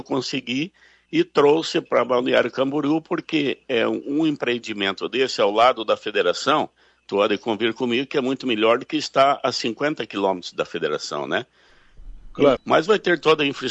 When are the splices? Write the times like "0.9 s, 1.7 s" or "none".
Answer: 12.6 s